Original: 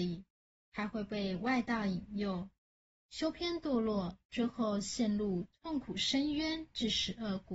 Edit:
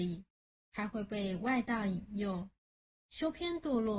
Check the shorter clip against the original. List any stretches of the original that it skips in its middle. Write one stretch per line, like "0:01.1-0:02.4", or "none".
none